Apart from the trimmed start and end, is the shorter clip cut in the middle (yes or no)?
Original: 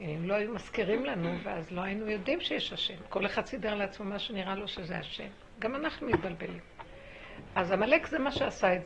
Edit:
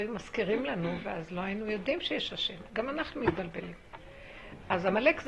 yes